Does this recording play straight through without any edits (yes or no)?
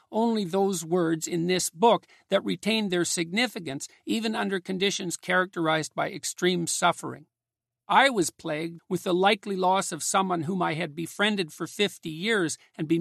no